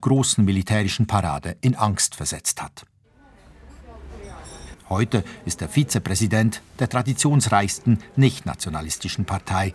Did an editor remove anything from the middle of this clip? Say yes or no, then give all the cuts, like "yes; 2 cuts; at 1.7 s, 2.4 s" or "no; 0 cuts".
yes; 1 cut; at 4.7 s